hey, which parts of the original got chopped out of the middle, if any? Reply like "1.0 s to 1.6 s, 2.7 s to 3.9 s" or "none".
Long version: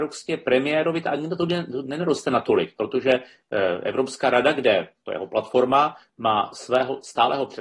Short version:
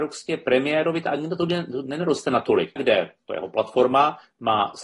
2.8 s to 4.5 s